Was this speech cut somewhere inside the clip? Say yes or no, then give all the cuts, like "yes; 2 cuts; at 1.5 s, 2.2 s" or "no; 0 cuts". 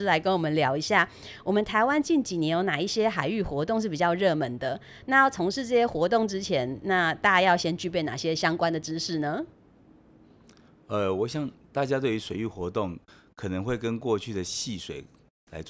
no; 0 cuts